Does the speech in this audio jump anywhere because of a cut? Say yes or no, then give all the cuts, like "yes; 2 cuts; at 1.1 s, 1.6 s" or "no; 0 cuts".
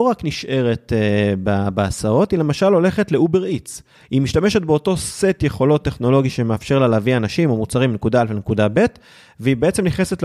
yes; 1 cut; at 4.0 s